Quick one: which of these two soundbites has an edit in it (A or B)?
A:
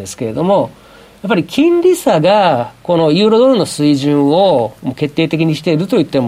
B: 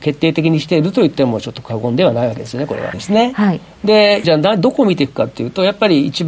B